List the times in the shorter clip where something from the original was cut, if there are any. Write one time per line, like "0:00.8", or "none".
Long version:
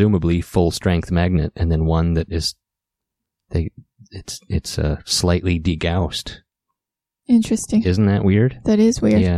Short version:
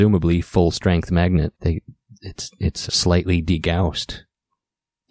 0:01.5
0:02.9